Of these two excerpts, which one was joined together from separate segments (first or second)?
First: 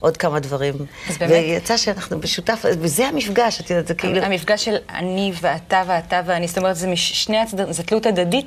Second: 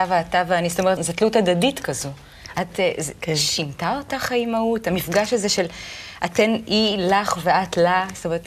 second